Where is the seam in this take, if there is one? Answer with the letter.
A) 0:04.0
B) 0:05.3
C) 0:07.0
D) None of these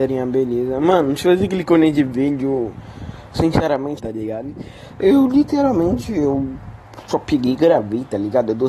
A